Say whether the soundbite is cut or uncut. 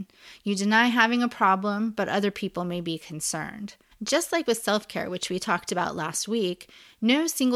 cut